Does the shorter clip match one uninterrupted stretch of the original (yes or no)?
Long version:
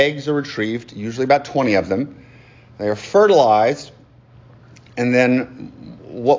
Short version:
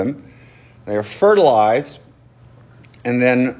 yes